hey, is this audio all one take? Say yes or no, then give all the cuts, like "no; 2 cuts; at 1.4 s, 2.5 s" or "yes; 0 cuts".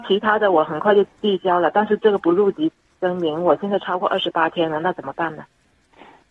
yes; 0 cuts